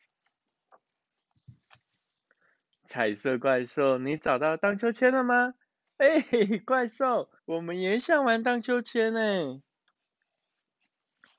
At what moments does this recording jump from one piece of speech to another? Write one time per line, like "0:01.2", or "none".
0:02.8
0:07.4